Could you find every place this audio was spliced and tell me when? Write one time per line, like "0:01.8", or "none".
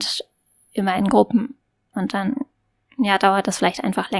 0:01.9